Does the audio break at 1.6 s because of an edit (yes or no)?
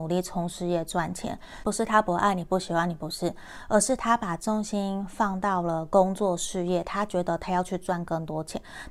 yes